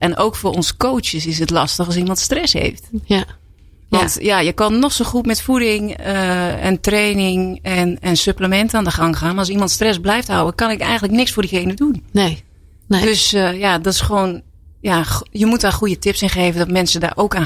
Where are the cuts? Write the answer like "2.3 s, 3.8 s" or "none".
none